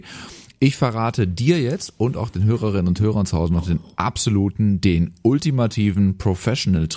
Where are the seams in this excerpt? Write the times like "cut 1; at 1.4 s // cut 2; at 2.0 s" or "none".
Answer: none